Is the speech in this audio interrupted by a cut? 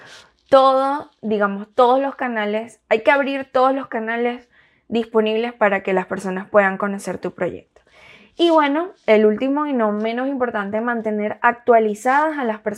no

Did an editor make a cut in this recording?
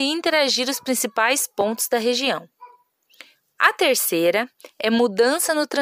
yes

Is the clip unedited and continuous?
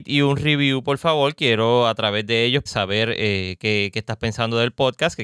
no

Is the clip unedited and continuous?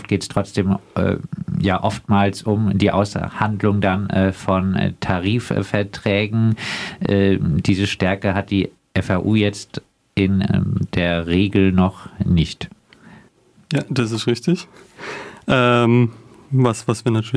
yes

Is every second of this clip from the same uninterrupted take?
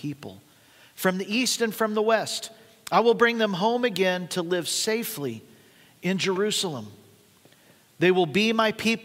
yes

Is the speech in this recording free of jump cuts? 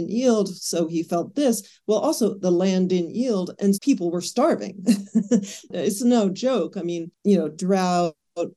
no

